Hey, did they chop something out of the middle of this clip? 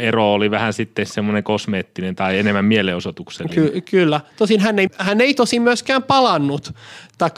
yes; 1 cut; at 4.9 s

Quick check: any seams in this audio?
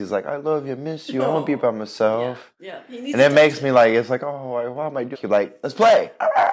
yes; 1 cut; at 5.1 s

